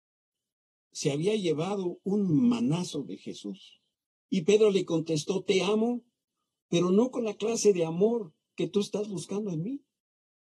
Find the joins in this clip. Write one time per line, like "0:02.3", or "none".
0:04.1